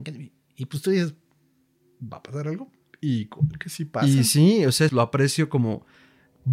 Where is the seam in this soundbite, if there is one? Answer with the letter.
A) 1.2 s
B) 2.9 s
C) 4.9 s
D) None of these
C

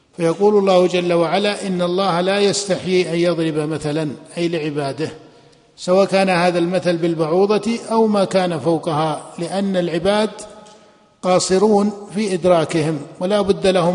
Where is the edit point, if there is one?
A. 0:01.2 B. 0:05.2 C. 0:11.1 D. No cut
D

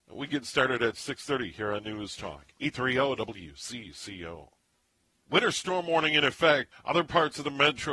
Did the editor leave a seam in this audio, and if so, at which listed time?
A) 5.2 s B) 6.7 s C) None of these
B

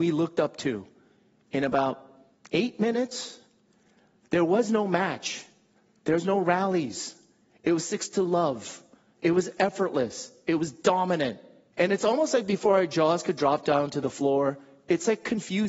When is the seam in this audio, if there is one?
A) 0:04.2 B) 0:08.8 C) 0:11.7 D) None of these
C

